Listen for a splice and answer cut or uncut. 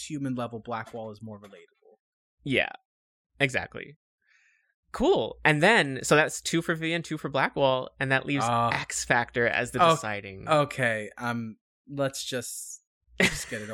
uncut